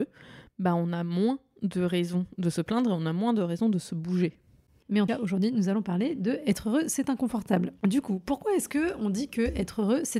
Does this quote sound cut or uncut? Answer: cut